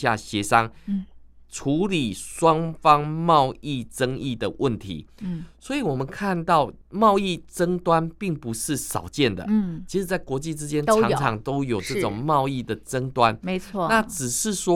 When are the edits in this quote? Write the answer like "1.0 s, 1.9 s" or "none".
6.8 s